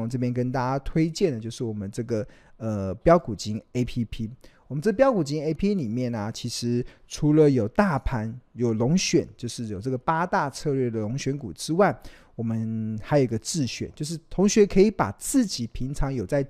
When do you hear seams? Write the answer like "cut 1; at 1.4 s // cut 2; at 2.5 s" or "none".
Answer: cut 1; at 5.6 s